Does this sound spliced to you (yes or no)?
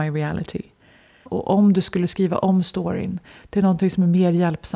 yes